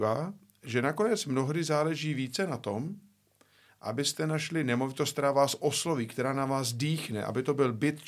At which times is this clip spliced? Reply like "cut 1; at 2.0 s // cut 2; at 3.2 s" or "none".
none